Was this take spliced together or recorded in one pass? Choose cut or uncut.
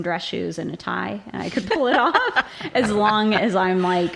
uncut